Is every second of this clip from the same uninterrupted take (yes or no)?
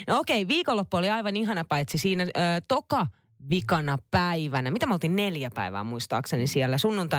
yes